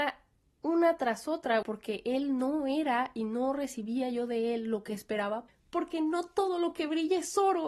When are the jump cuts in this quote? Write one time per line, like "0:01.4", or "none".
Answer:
0:01.6
0:05.5